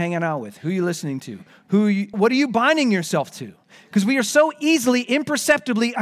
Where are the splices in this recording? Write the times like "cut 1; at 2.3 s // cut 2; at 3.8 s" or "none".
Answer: cut 1; at 2.1 s